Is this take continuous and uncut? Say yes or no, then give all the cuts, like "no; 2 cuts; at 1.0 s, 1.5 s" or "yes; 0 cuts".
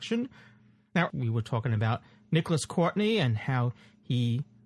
no; 1 cut; at 1.1 s